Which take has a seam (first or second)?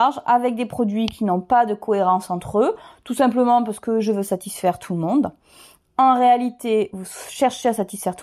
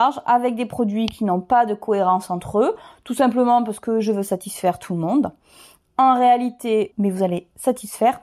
second